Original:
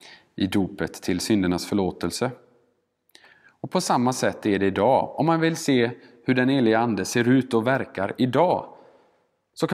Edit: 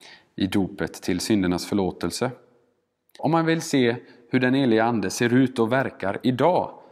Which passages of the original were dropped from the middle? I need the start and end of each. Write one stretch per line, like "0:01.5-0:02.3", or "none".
0:03.2-0:05.1